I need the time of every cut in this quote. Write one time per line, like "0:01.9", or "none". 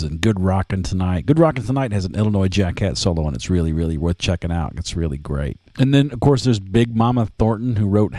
none